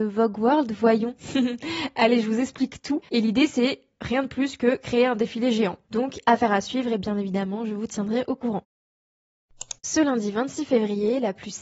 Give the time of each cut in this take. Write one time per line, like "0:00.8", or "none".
0:03.0
0:05.9